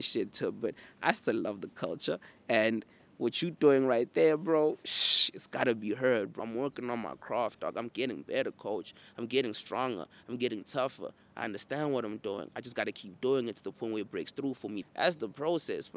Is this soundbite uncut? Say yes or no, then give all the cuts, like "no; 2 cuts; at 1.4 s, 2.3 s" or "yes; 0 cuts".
no; 2 cuts; at 6.4 s, 14.8 s